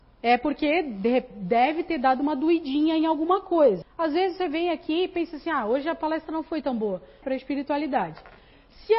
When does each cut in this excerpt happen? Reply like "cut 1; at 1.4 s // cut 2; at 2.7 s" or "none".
cut 1; at 3.8 s // cut 2; at 7.2 s